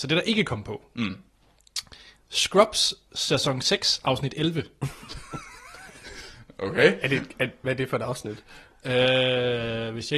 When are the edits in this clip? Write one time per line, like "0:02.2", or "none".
none